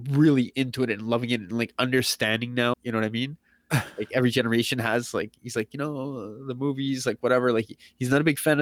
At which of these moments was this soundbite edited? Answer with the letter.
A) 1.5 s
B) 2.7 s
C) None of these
B